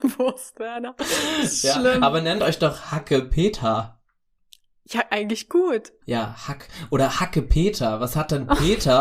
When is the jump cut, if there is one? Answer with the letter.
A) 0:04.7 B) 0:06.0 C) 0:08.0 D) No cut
B